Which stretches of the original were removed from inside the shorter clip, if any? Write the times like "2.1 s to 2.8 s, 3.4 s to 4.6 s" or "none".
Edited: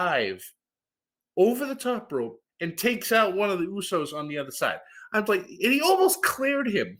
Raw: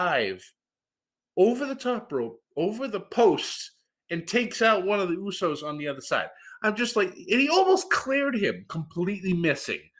2.5 s to 4.0 s, 6.8 s to 6.9 s